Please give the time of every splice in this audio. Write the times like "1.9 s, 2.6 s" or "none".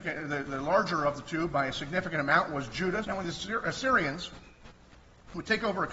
3.0 s